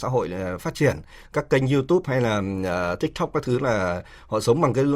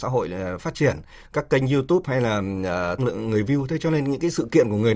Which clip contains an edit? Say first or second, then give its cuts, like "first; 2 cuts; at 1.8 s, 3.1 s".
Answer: second; 1 cut; at 3.0 s